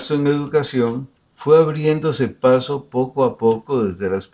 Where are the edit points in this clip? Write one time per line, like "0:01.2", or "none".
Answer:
0:01.2

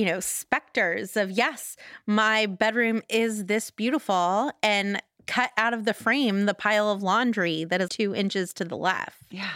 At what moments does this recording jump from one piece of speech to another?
0:07.9

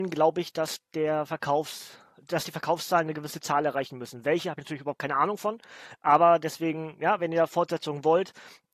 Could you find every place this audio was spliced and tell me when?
none

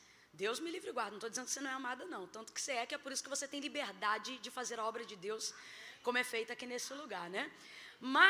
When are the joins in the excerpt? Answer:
none

